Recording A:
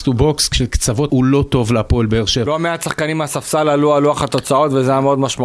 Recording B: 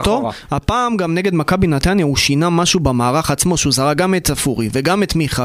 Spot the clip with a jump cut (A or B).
A